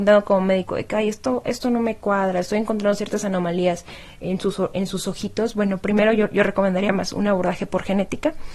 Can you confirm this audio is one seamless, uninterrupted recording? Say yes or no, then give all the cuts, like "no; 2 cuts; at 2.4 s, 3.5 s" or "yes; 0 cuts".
yes; 0 cuts